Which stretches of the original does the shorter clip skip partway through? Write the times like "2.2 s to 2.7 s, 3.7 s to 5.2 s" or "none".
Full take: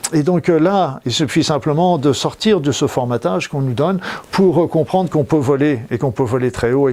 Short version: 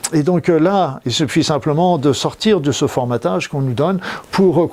none

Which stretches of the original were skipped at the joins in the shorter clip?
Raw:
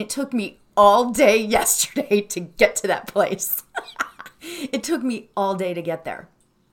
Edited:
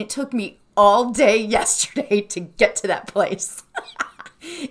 none

